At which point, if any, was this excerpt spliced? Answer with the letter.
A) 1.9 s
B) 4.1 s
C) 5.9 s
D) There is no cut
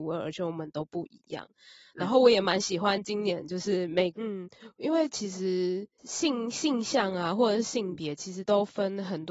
B